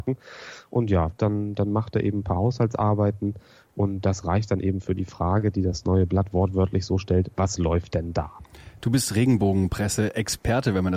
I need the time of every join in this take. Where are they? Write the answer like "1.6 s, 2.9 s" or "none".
none